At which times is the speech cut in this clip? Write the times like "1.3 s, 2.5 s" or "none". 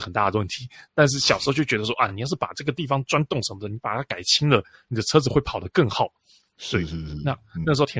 none